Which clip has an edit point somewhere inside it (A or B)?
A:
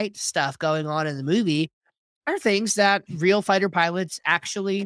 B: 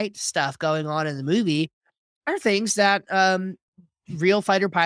A